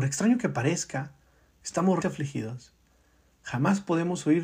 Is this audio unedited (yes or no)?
no